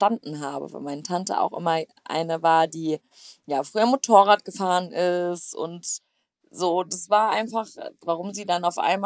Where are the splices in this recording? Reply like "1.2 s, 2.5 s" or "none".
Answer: 8.0 s